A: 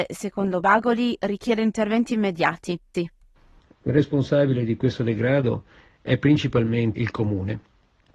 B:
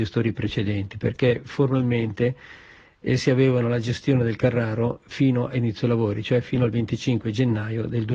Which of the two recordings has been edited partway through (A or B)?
A